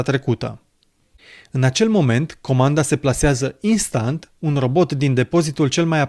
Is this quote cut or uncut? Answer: uncut